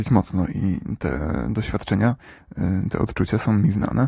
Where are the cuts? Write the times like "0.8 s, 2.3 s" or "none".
none